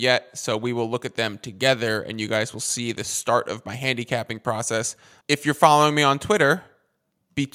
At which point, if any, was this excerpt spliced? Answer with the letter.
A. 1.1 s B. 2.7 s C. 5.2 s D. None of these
C